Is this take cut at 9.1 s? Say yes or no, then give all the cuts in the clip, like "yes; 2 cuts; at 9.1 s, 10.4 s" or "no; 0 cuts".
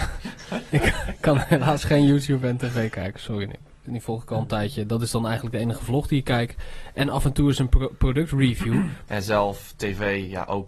yes; 2 cuts; at 3.9 s, 9.1 s